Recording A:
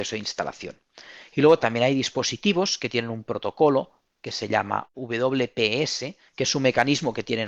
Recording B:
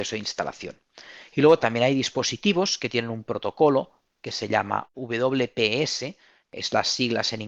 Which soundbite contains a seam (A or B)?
A